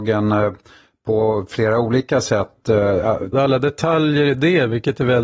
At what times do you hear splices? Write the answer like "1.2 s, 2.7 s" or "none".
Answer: 3.3 s